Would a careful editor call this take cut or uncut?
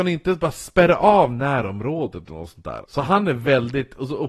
cut